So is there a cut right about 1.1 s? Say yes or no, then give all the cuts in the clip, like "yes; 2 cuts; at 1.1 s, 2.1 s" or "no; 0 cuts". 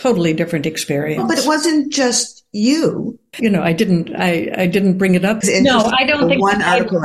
no; 2 cuts; at 3.3 s, 5.4 s